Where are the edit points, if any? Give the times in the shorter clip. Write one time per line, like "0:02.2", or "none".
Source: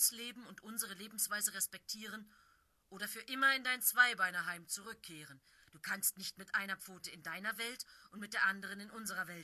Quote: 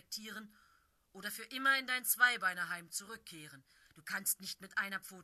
none